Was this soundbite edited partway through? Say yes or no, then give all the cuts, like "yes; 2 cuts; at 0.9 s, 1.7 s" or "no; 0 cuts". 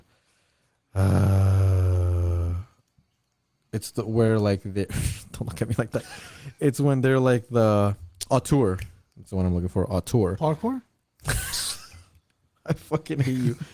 no; 0 cuts